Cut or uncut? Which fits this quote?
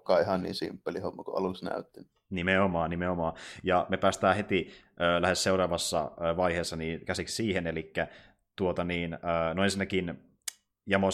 uncut